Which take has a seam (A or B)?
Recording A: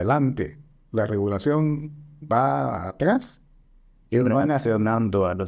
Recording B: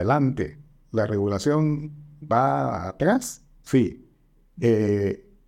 B